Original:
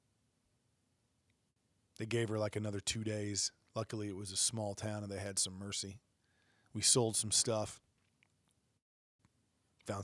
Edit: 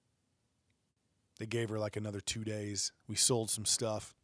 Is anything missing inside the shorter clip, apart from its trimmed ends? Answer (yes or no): yes